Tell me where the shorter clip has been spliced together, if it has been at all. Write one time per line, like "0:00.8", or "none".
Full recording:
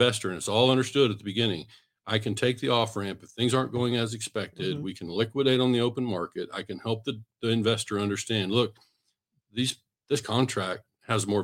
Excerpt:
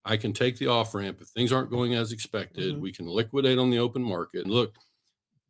0:04.4